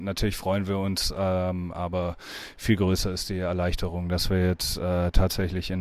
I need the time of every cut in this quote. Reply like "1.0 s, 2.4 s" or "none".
none